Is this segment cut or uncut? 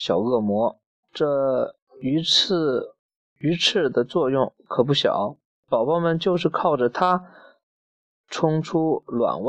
cut